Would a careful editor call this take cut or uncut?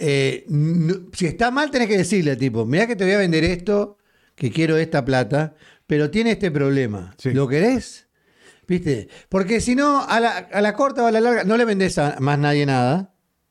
uncut